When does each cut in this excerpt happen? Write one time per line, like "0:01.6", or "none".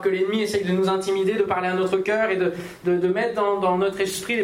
none